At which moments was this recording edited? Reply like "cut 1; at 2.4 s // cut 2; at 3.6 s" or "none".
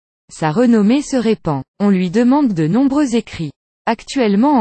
none